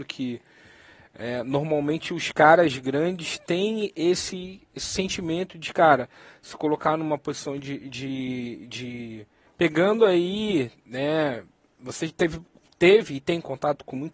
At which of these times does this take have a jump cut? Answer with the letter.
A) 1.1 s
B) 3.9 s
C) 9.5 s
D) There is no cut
C